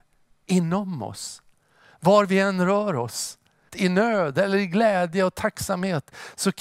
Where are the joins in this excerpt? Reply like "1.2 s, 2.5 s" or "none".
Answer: 3.7 s